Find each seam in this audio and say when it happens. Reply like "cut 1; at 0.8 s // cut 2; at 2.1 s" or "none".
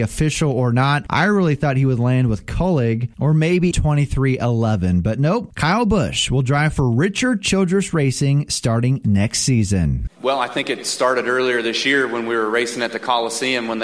cut 1; at 3.7 s